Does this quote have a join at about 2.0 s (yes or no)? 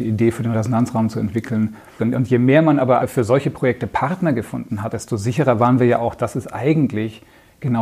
yes